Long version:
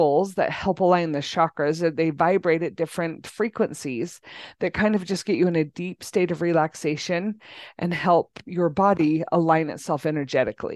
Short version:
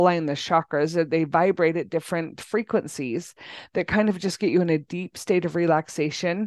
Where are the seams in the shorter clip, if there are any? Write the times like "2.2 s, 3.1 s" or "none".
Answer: none